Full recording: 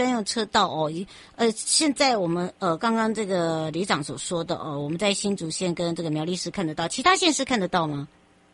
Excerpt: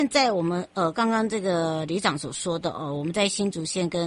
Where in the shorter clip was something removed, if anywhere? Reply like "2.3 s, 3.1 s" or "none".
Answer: none